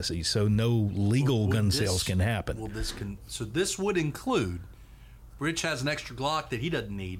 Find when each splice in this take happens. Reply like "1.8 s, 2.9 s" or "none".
3.3 s